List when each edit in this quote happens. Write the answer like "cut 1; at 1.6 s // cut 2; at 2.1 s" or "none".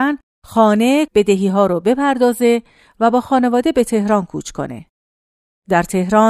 cut 1; at 1.1 s